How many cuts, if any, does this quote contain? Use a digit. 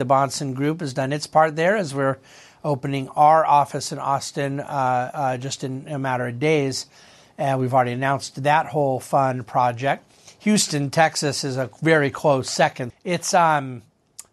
1